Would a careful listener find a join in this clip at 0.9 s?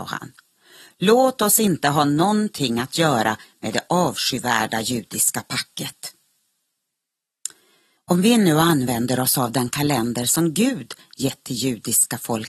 no; 1 cut; at 8.0 s

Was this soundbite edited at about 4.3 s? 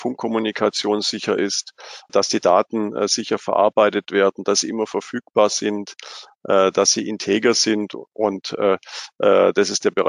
no; 1 cut; at 2.1 s

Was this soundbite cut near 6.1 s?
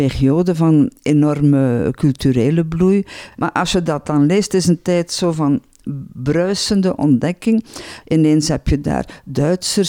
no; 2 cuts; at 3.3 s, 8.0 s

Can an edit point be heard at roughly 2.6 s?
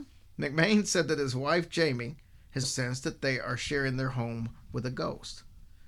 yes; 1 cut; at 2.6 s

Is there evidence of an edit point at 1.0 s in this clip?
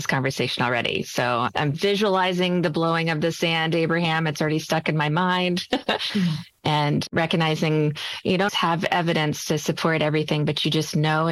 no; 2 cuts; at 6.1 s, 8.5 s

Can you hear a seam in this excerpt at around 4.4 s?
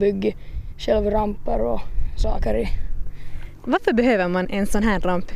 yes; 1 cut; at 4.4 s

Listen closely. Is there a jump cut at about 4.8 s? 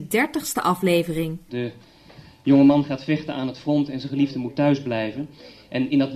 no; 1 cut; at 1.5 s

